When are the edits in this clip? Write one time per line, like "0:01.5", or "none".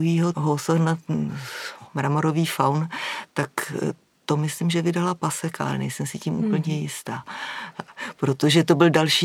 none